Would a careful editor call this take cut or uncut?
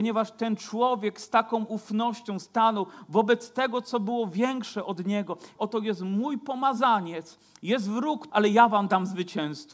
cut